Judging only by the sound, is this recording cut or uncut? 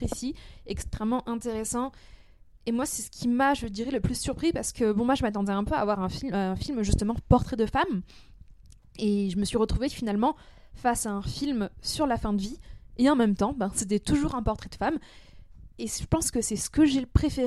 uncut